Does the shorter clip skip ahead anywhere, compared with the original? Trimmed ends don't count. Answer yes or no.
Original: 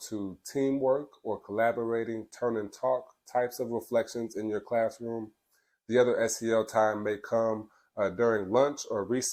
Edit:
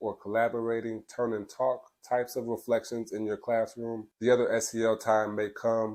yes